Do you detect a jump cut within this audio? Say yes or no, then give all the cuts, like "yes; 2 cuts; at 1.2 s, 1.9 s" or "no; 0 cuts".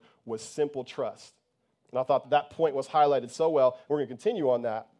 yes; 1 cut; at 2.2 s